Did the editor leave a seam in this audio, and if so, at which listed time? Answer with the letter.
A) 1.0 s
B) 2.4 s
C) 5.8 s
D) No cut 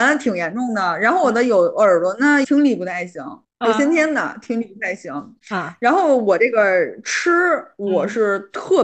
B